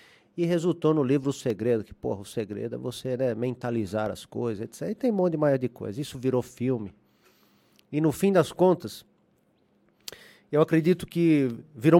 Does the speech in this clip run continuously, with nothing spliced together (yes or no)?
yes